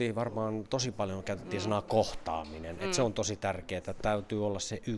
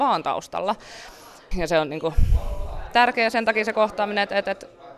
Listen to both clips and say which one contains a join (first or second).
second